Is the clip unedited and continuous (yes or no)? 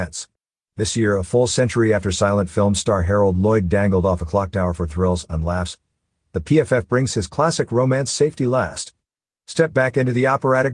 no